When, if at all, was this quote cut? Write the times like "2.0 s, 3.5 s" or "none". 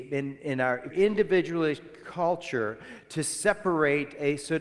0.9 s